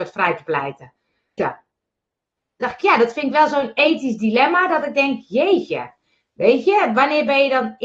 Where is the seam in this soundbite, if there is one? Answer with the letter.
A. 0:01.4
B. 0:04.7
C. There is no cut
A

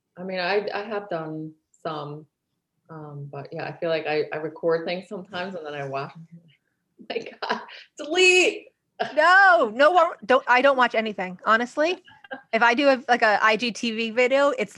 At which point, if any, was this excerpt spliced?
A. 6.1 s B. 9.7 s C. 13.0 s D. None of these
D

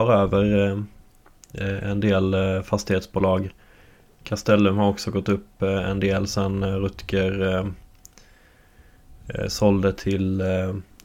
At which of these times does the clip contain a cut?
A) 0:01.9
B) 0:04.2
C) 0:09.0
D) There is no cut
B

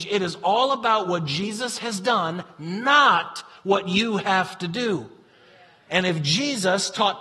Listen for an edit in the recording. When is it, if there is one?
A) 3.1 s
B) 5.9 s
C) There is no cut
B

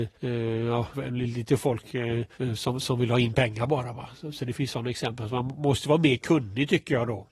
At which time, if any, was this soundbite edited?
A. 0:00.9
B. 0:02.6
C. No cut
A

